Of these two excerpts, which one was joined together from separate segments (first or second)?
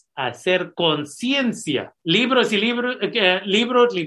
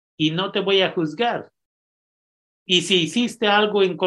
first